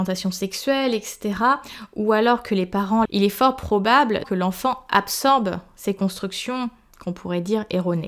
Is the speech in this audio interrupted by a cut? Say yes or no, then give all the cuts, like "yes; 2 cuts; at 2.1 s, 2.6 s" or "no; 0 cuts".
yes; 2 cuts; at 3.1 s, 4.2 s